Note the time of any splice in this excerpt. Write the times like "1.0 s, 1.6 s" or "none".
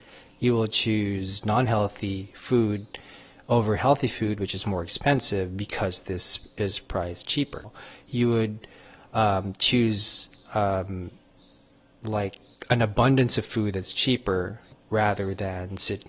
none